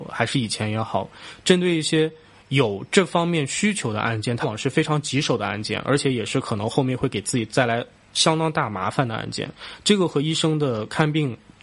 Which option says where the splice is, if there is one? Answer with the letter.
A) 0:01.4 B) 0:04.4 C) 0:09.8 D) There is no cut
B